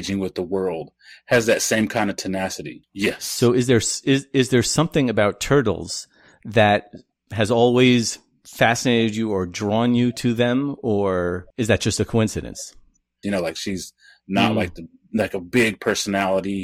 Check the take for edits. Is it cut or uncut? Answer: cut